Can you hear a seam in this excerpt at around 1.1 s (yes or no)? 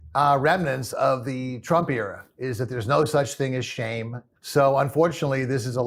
no